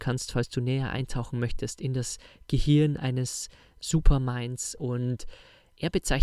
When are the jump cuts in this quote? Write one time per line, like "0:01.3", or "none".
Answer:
none